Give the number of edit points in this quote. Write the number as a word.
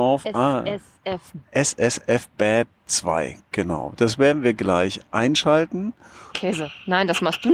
two